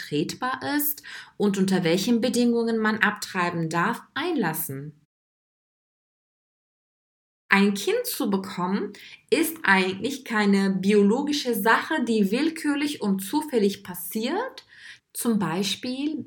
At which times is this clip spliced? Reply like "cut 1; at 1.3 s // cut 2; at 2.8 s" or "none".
cut 1; at 15.0 s